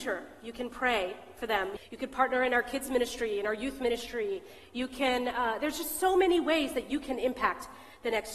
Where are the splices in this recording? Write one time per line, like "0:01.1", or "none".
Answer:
0:01.8